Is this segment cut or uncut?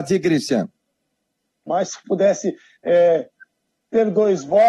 cut